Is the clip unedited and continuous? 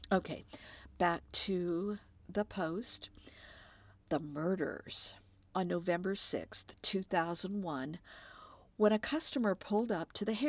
no; 1 cut; at 5.5 s

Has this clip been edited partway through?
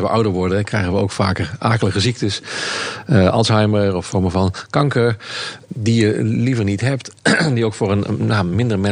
yes; 1 cut; at 5.7 s

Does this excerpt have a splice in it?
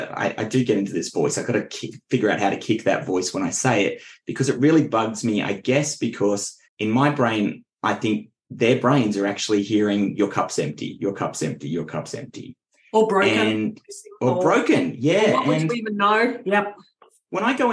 yes; 1 cut; at 6.7 s

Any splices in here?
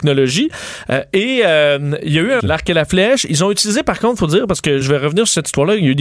yes; 2 cuts; at 2.4 s, 4.8 s

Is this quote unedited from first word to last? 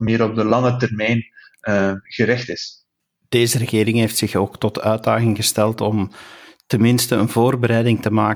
yes; 0 cuts

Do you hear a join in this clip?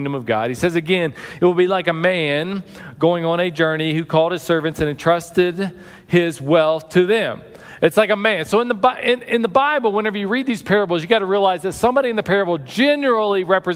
no; 0 cuts

